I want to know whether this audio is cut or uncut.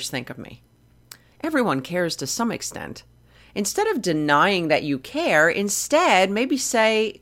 cut